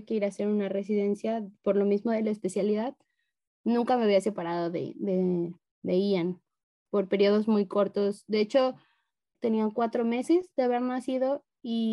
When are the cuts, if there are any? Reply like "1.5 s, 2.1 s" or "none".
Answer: 9.3 s